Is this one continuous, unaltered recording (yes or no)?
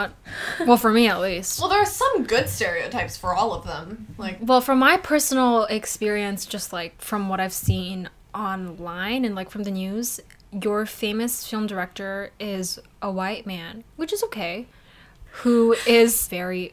yes